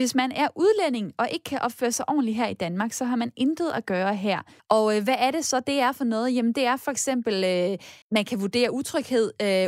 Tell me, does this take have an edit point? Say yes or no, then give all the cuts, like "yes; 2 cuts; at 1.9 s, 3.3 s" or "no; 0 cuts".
yes; 2 cuts; at 4.6 s, 8.0 s